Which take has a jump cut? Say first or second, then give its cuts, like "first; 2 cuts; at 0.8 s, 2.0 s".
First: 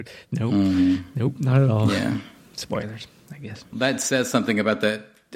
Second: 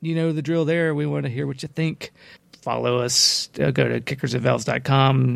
first; 1 cut; at 3.7 s